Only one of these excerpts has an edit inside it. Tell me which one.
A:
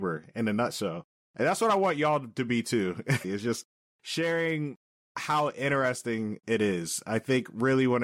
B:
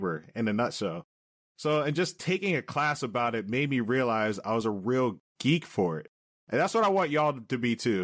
A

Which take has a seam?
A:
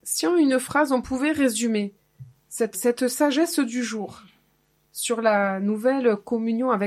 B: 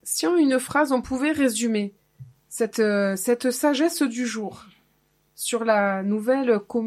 A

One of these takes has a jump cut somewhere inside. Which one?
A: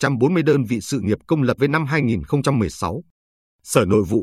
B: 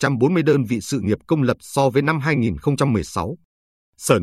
A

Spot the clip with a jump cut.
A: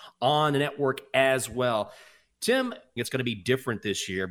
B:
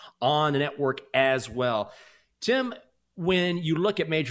A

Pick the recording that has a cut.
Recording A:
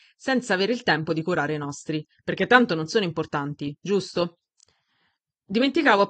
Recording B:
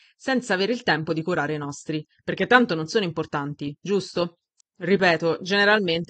B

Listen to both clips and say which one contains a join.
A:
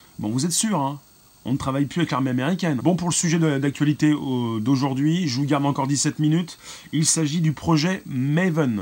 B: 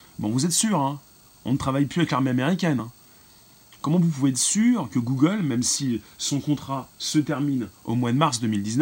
A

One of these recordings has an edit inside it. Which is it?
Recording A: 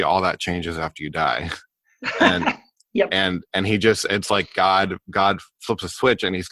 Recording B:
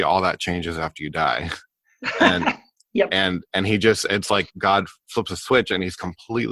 B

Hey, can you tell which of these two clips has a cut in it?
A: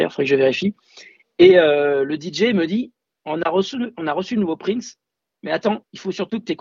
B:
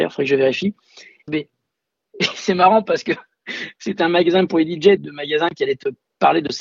B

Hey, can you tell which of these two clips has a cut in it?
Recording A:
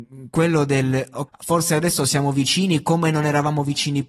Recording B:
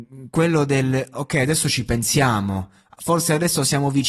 A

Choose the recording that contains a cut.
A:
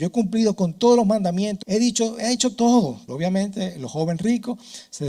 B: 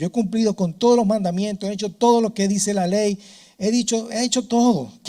A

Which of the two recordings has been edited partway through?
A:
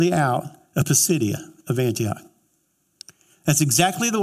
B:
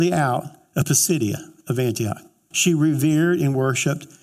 B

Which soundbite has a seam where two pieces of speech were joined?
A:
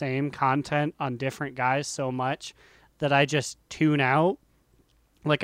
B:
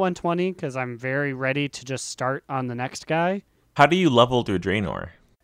B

